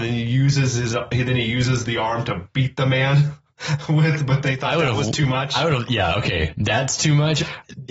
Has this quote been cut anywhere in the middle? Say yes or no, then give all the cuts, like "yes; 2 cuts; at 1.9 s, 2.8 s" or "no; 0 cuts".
no; 0 cuts